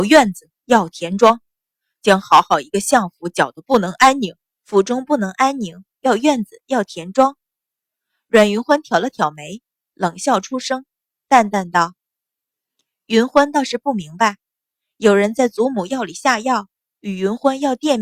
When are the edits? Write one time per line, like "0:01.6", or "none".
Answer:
0:04.5
0:06.0